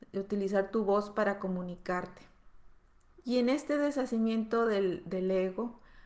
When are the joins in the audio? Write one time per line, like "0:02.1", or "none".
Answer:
0:03.2